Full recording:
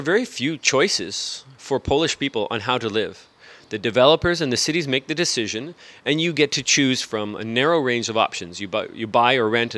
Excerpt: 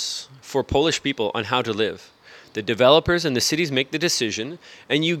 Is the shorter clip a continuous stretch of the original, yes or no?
yes